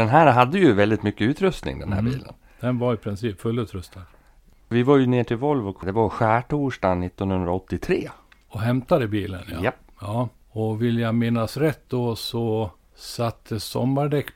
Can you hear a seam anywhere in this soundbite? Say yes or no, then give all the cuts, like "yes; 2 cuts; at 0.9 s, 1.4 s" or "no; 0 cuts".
no; 0 cuts